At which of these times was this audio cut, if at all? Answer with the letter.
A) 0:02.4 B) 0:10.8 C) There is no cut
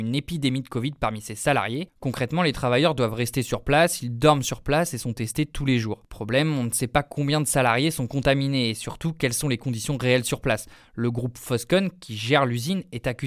C